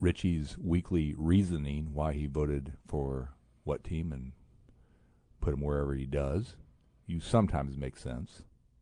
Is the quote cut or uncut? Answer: uncut